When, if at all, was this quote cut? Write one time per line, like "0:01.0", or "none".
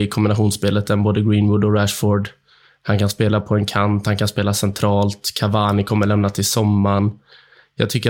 none